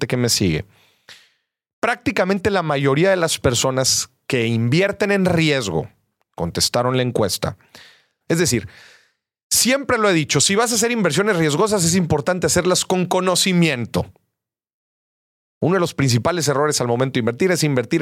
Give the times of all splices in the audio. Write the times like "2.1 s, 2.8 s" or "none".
8.2 s

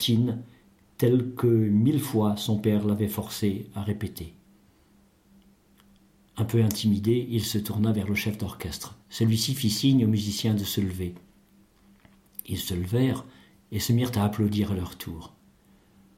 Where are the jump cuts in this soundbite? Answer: 9.0 s

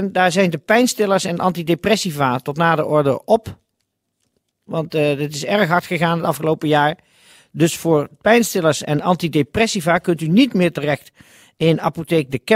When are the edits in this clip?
none

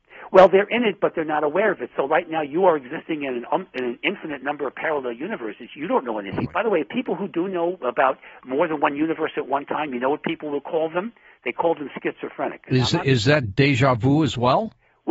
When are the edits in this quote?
6.4 s

